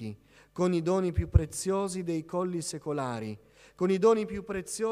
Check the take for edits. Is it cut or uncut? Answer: uncut